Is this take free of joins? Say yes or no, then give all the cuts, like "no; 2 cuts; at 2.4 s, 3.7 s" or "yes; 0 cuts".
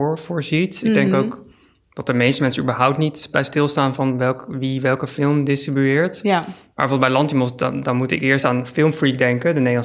yes; 0 cuts